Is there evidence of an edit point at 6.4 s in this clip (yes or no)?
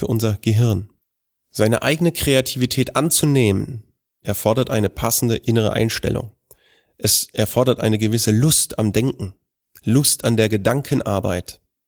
no